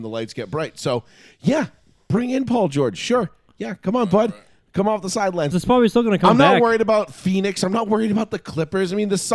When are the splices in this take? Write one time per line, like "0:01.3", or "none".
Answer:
0:05.5